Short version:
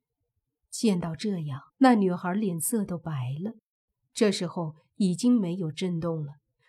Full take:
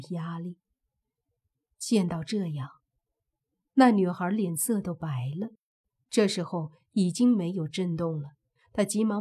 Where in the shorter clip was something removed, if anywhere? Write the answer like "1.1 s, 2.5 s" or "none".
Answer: 1.7 s